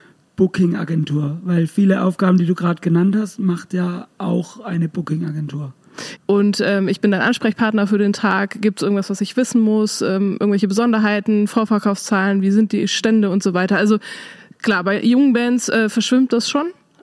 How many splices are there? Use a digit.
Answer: 1